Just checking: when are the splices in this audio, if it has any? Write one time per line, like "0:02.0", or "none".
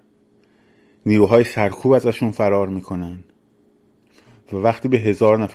none